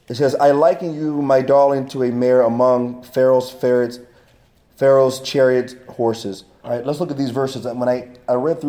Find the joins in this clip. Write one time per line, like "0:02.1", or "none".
0:06.6